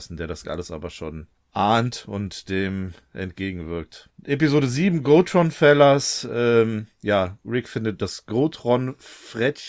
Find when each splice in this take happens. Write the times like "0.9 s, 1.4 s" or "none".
none